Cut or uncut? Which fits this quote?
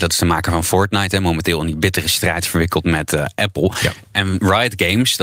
uncut